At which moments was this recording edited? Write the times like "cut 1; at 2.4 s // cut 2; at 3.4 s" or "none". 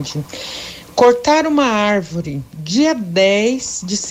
none